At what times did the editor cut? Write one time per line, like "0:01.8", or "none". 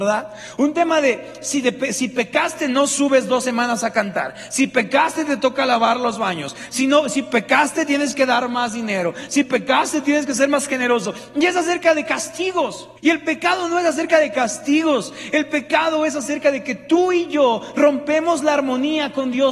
0:13.0